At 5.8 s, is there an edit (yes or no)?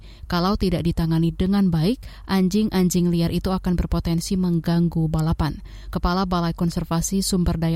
no